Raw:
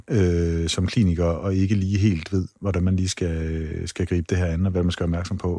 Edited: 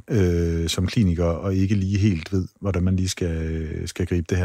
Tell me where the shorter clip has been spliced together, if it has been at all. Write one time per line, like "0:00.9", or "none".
none